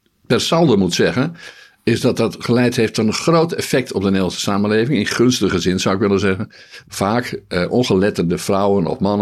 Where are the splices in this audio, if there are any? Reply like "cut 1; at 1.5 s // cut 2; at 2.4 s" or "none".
cut 1; at 6.8 s